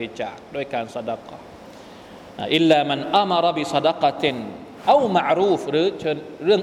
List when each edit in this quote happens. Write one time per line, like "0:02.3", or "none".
none